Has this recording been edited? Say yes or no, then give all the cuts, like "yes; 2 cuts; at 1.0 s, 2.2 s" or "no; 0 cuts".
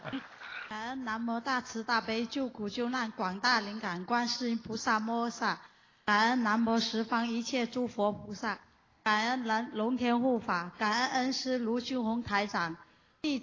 no; 0 cuts